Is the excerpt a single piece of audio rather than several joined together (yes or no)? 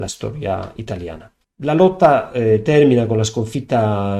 yes